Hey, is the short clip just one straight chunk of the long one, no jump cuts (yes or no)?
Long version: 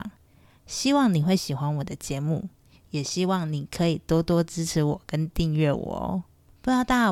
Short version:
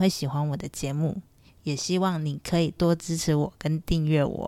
no